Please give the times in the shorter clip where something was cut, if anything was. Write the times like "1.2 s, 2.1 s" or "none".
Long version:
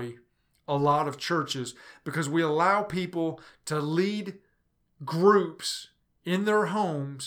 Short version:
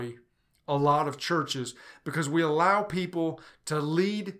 none